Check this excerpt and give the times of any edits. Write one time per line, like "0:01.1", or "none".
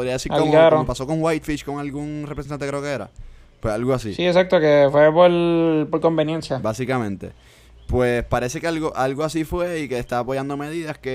none